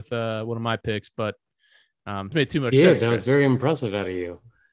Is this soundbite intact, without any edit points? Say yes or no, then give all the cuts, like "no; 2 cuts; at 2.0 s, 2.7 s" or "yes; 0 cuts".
no; 1 cut; at 2.3 s